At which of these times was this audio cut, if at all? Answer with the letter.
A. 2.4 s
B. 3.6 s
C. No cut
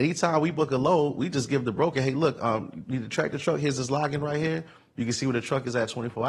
C